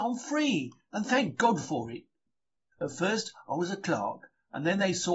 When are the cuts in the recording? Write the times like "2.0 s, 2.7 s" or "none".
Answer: 2.7 s